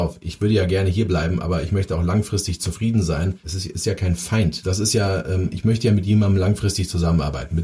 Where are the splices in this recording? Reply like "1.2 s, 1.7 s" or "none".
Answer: 3.4 s, 4.6 s